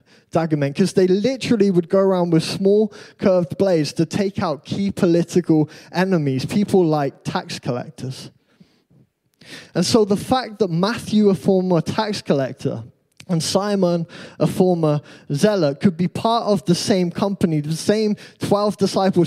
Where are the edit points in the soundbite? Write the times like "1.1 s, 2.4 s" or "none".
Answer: none

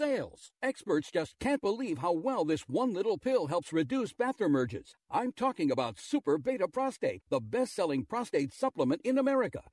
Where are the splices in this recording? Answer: none

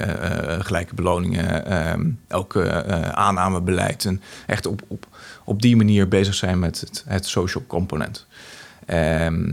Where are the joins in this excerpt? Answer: none

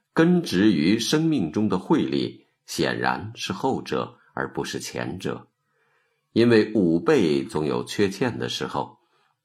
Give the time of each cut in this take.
none

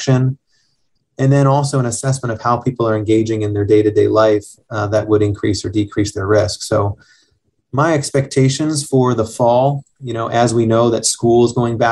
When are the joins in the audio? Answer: none

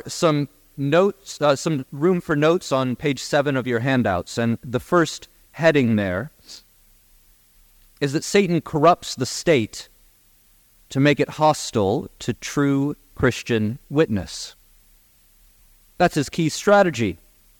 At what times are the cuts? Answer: none

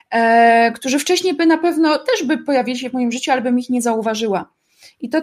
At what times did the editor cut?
none

